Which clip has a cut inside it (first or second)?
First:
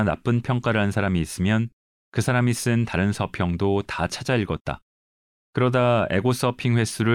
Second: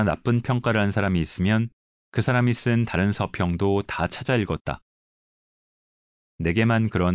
first